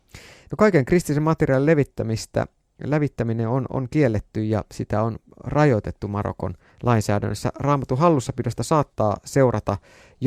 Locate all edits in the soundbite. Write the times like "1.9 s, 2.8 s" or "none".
none